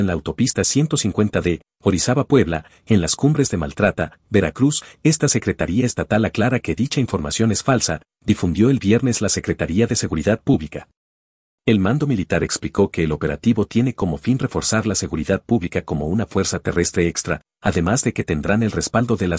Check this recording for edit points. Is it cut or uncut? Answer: cut